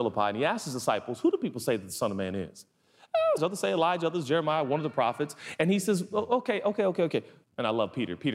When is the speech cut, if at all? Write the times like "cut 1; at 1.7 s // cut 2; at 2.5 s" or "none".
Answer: cut 1; at 3.4 s // cut 2; at 7.4 s